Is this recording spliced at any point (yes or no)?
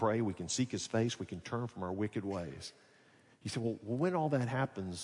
no